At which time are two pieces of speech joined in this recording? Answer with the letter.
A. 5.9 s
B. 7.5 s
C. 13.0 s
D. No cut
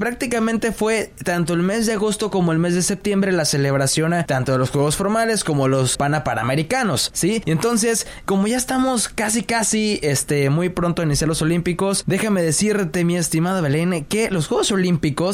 A